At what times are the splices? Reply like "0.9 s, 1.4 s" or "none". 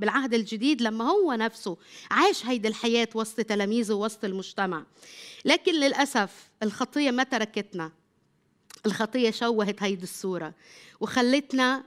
none

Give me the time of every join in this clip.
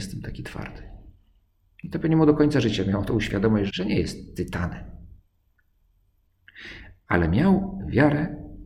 3.7 s

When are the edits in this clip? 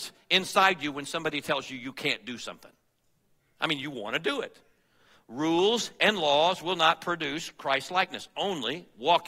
none

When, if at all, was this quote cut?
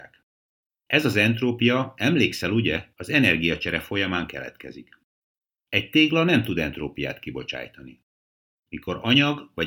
none

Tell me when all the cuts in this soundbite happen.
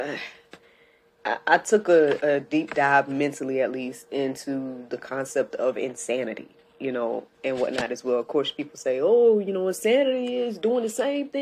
none

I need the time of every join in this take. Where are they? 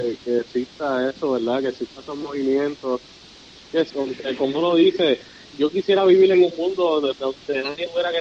3.9 s, 7.1 s

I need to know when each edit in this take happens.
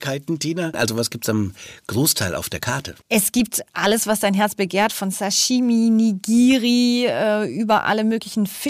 none

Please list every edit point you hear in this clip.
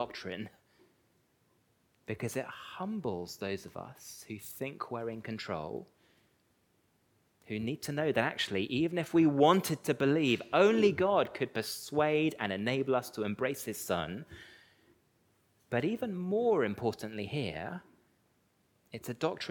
none

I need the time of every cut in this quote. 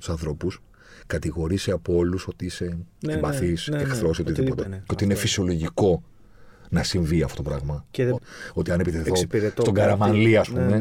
4.6 s, 8.2 s

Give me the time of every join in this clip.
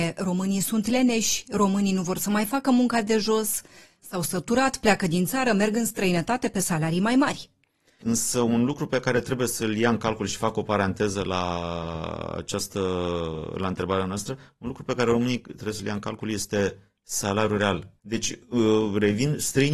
8.0 s, 18.0 s

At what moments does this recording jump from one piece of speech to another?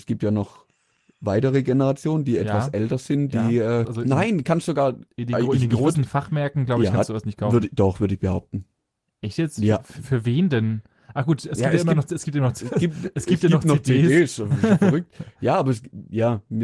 3.8 s

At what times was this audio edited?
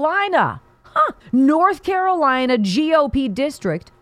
1.2 s

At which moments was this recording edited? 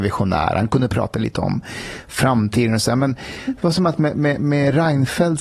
none

